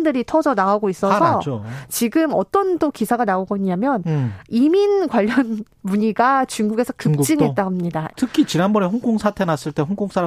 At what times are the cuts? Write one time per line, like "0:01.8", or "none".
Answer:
0:08.1